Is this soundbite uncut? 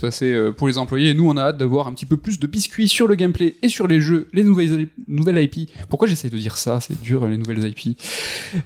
no; 1 cut; at 2.4 s

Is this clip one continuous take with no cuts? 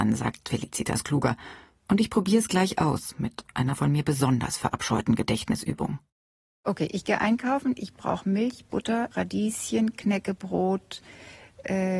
yes; 0 cuts

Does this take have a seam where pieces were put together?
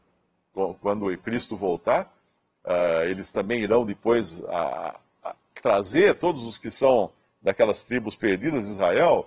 no; 0 cuts

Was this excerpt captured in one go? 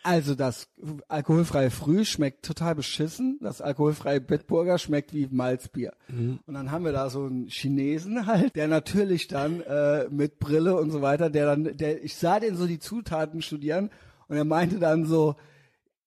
no; 1 cut; at 8.5 s

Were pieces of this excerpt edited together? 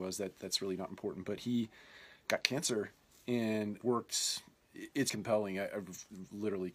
yes; 2 cuts; at 3.8 s, 5.1 s

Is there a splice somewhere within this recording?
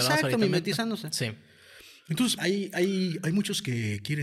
yes; 1 cut; at 2.4 s

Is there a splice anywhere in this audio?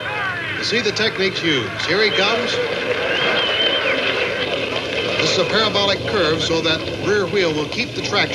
no; 0 cuts

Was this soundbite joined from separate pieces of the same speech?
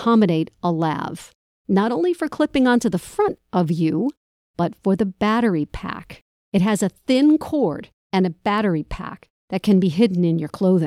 yes; 1 cut; at 6.4 s

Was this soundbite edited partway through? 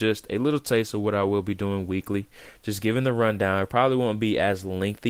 no; 0 cuts

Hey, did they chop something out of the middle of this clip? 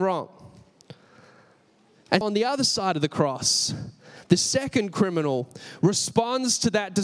yes; 1 cut; at 2.2 s

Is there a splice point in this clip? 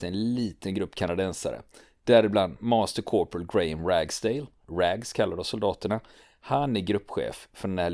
no; 0 cuts

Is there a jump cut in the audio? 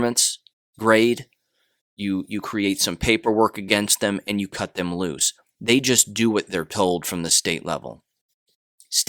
yes; 1 cut; at 5.5 s

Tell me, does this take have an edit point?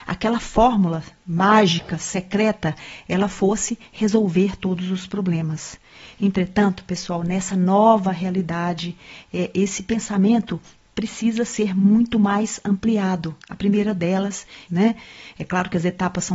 yes; 2 cuts; at 13.4 s, 14.7 s

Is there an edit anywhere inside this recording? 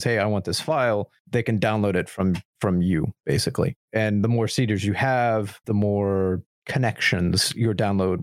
yes; 1 cut; at 5.6 s

